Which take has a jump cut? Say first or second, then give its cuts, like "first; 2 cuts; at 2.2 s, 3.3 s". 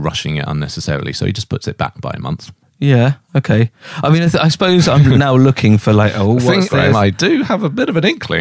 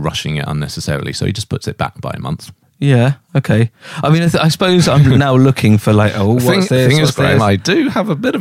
first; 1 cut; at 6.7 s